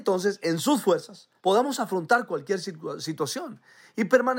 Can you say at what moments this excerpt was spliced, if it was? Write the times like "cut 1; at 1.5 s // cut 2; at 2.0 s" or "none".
cut 1; at 1.4 s